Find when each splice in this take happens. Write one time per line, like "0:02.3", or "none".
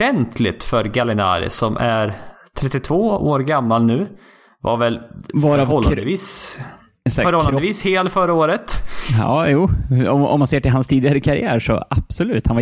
none